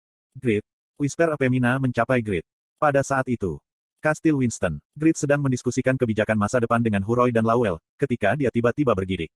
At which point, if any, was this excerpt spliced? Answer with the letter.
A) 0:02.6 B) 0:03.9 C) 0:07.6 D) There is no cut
B